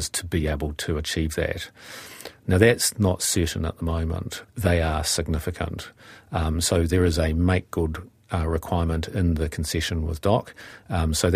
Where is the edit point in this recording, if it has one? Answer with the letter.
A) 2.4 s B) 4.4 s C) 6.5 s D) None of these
B